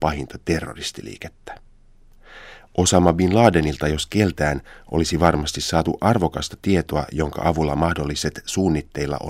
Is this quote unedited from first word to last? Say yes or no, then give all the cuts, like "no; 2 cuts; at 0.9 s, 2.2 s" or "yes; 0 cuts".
yes; 0 cuts